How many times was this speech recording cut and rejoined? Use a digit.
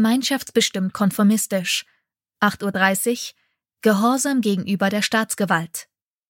0